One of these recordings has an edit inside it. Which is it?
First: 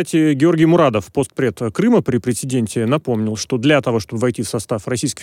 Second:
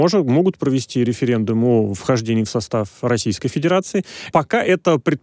second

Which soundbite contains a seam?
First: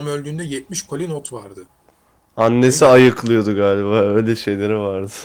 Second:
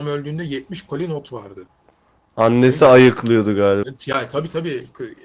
second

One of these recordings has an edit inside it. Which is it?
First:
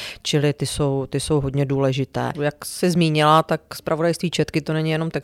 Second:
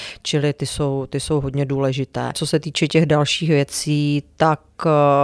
first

